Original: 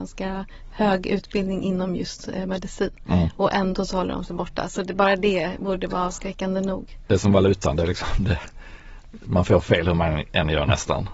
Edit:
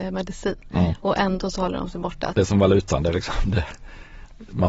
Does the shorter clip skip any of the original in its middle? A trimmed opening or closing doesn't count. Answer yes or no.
yes